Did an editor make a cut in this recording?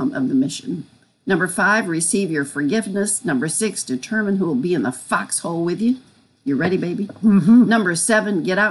no; 0 cuts

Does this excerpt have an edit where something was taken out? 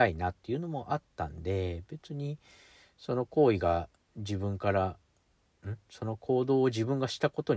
no; 0 cuts

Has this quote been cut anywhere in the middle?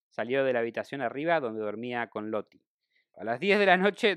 yes; 1 cut; at 3.1 s

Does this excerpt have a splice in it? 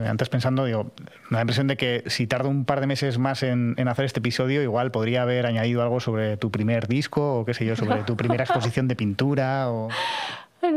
no; 0 cuts

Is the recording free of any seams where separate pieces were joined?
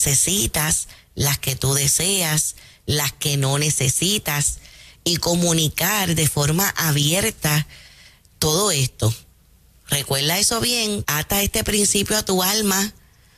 no; 1 cut; at 11.0 s

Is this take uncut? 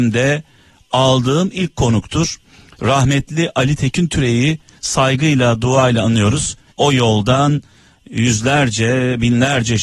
no; 1 cut; at 6.7 s

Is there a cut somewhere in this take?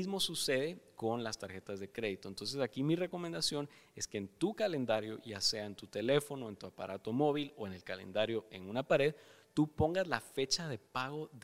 no; 0 cuts

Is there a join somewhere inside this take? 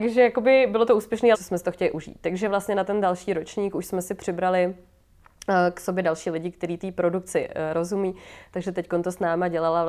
yes; 1 cut; at 1.3 s

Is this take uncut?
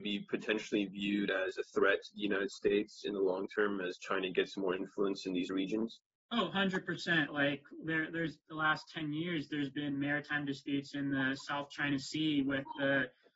no; 2 cuts; at 7.3 s, 8.4 s

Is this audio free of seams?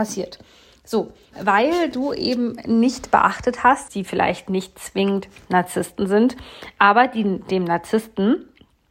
no; 2 cuts; at 1.3 s, 3.9 s

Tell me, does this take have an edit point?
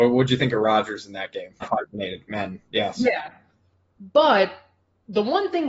yes; 1 cut; at 1.6 s

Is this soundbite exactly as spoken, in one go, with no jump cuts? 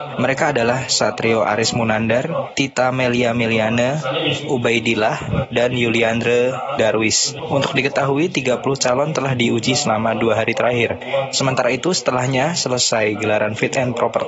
yes; 0 cuts

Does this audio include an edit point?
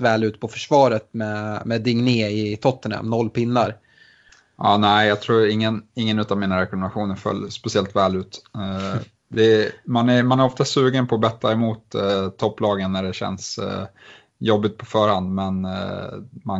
no; 0 cuts

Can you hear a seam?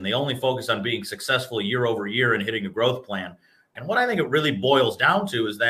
yes; 1 cut; at 3.8 s

